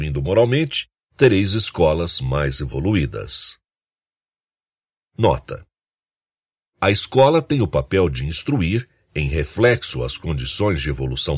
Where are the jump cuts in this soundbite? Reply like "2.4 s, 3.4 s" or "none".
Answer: none